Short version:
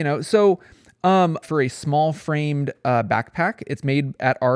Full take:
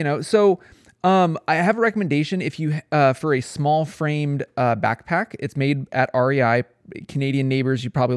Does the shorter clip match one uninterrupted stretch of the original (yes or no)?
no